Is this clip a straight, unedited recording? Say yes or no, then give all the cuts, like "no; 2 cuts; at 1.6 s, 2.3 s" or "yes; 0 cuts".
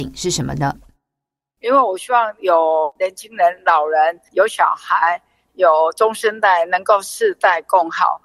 yes; 0 cuts